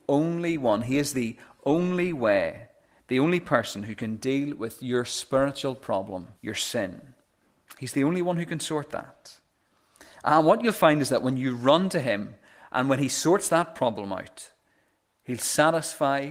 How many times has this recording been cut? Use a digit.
1